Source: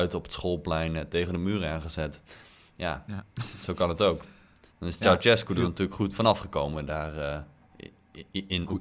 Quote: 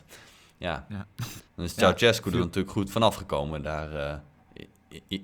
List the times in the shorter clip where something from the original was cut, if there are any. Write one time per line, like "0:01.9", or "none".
0:01.4